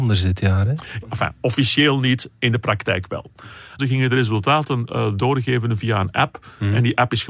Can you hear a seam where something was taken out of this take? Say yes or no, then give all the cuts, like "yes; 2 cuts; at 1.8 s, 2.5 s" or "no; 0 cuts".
yes; 2 cuts; at 1.0 s, 3.8 s